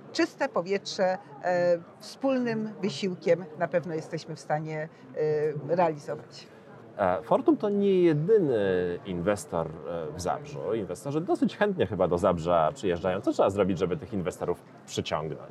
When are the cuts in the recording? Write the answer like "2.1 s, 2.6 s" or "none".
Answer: none